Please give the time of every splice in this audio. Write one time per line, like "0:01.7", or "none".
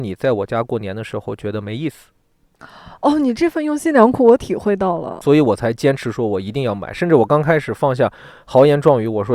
none